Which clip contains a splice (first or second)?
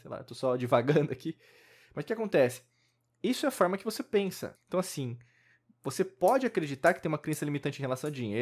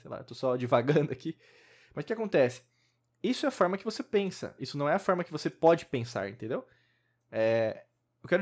first